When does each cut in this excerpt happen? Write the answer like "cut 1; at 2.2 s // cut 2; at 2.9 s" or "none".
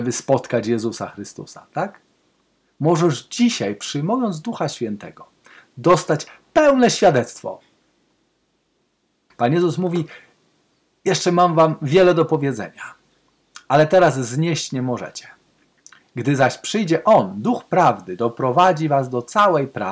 cut 1; at 9.3 s